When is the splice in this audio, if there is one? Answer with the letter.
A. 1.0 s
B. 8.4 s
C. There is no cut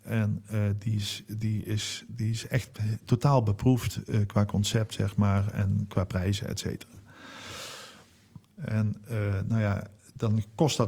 B